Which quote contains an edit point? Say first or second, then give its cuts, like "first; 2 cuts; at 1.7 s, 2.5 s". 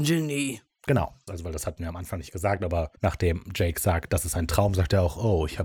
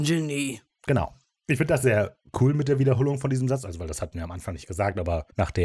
first; 1 cut; at 1.3 s